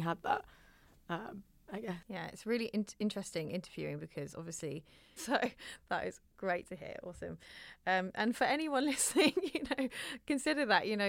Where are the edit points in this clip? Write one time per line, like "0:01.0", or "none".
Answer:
0:01.6
0:05.2